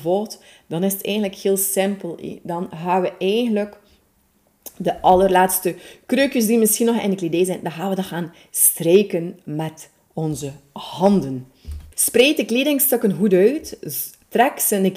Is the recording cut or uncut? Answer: cut